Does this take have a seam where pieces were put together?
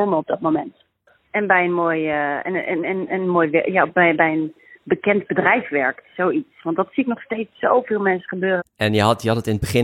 yes; 1 cut; at 8.6 s

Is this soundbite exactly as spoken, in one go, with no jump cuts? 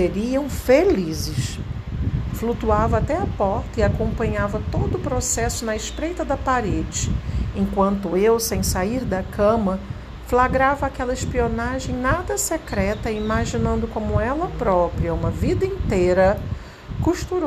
no; 1 cut; at 2.3 s

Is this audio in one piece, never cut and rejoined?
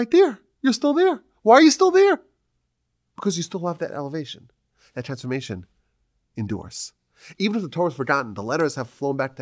yes; 0 cuts

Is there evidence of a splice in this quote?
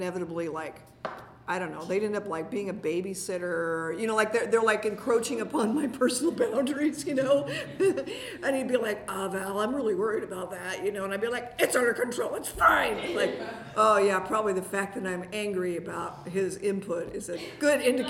no; 0 cuts

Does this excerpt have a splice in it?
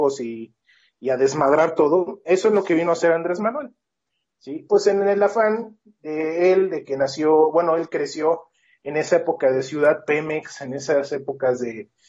yes; 1 cut; at 4.7 s

